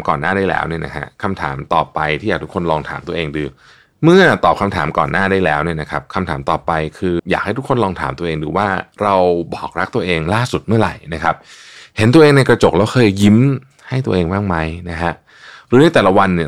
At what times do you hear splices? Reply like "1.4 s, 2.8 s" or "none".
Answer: 7.2 s